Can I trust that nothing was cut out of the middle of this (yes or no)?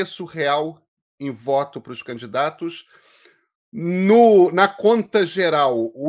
yes